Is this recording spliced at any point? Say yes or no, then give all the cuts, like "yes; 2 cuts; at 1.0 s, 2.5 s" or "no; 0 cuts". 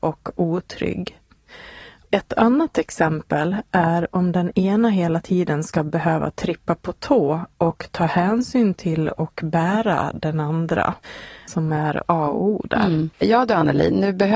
yes; 2 cuts; at 11.5 s, 13.1 s